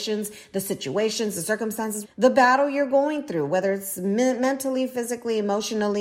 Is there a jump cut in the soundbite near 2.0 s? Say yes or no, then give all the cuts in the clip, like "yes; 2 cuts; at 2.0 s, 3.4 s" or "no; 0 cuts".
yes; 1 cut; at 2.0 s